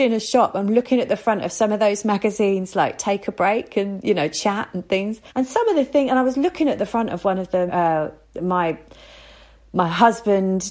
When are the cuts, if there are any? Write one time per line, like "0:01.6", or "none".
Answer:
0:05.3
0:07.7

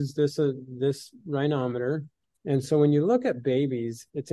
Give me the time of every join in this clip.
0:02.4

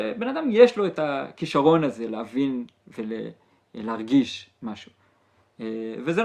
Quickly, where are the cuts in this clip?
none

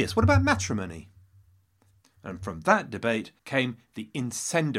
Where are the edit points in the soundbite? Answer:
0:02.0
0:03.4

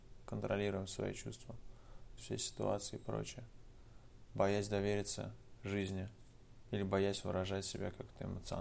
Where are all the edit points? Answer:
0:02.2

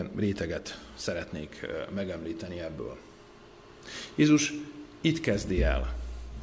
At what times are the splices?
none

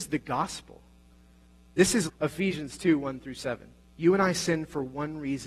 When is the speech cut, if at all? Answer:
0:02.1
0:03.8

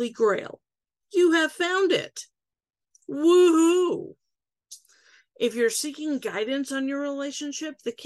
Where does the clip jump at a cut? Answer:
none

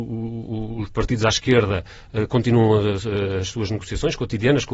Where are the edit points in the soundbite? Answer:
none

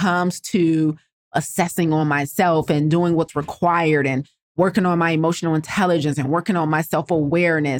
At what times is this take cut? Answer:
none

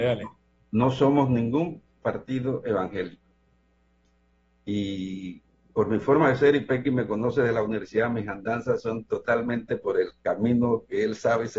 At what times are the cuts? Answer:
none

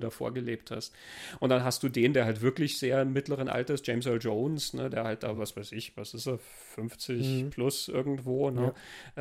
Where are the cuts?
none

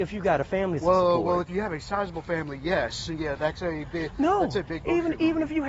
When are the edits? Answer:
none

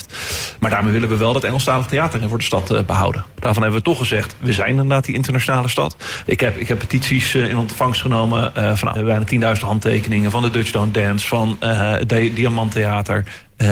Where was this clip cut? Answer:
0:03.4
0:06.3
0:09.0

